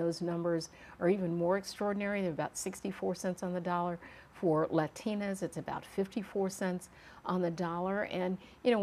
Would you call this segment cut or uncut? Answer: uncut